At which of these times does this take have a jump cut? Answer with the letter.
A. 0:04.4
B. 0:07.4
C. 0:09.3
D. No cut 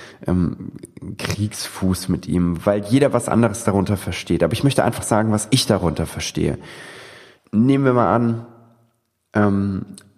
B